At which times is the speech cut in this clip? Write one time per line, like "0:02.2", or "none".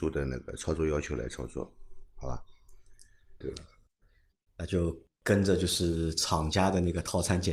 0:03.4